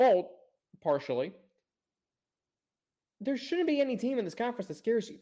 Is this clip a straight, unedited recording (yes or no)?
yes